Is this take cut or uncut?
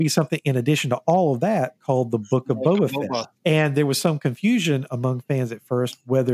cut